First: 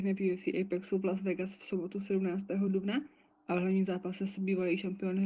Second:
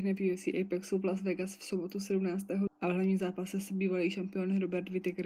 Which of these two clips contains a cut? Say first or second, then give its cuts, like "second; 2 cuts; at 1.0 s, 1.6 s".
second; 1 cut; at 2.7 s